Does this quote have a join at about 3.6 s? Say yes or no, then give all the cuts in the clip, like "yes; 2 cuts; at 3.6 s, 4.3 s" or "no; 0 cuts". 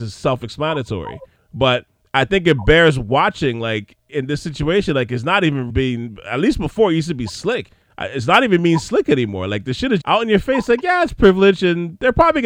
no; 2 cuts; at 5.7 s, 10.0 s